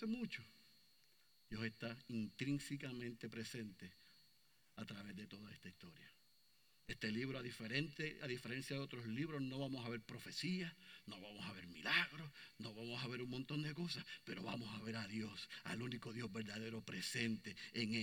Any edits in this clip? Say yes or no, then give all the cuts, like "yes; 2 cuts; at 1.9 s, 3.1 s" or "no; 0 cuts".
no; 0 cuts